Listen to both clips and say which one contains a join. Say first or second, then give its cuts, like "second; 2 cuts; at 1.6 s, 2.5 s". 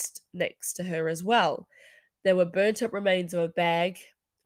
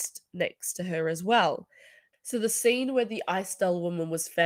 second; 1 cut; at 2.1 s